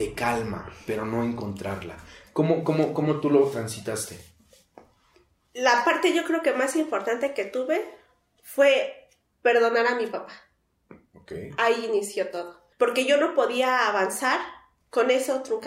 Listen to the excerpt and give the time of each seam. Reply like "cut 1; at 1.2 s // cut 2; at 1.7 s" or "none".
cut 1; at 12.7 s